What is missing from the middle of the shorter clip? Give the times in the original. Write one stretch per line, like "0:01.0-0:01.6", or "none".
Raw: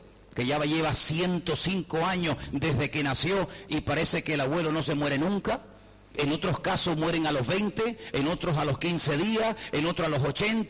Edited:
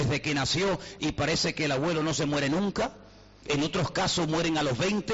none